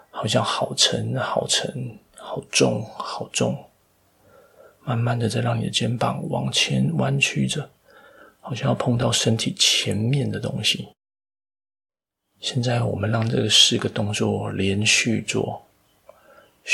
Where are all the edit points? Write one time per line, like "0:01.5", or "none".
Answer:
none

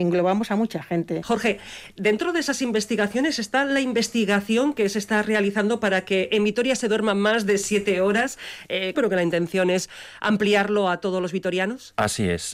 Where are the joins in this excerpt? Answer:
0:01.2
0:08.9

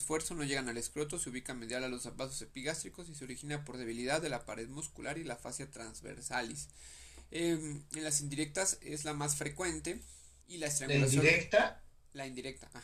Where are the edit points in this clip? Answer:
0:10.4

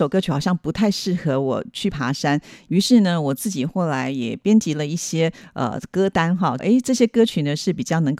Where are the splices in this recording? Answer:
0:06.6

